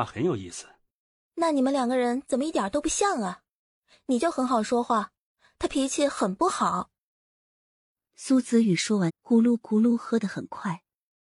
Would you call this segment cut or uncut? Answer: cut